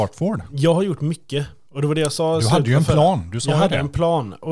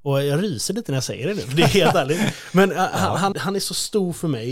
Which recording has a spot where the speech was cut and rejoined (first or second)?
second